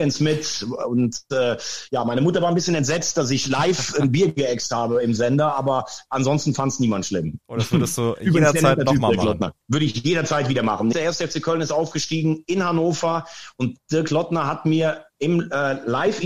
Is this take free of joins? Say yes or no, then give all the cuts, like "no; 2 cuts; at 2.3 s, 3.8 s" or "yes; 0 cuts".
no; 2 cuts; at 9.6 s, 10.9 s